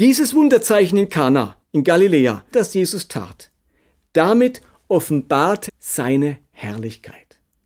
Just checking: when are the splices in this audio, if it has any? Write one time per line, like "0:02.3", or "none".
0:02.5
0:05.7